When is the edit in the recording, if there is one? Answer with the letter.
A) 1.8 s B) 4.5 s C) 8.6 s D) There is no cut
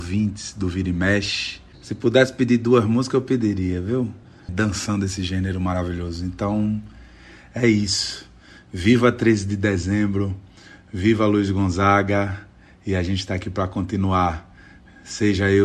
B